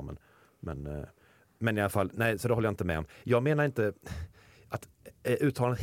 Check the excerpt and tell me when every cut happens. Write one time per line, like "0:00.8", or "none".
none